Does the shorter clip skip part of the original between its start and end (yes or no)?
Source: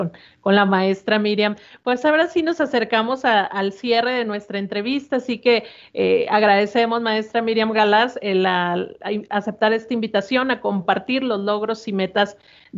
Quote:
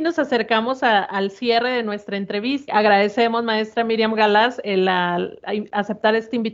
yes